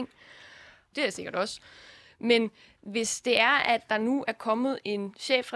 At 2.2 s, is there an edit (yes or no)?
no